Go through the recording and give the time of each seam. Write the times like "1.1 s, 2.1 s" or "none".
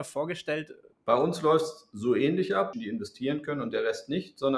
0.9 s, 2.7 s